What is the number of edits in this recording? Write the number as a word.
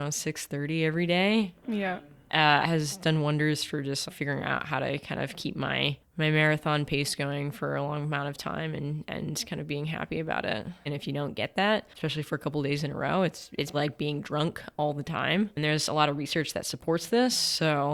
three